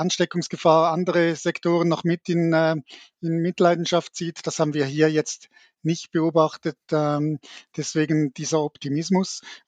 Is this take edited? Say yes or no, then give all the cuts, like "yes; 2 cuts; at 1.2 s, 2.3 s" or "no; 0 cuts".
no; 0 cuts